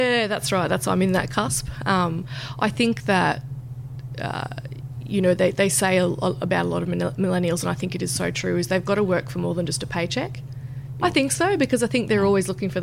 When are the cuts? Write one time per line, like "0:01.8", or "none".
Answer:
0:11.0